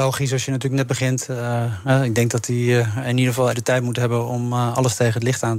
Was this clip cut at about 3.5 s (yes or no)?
yes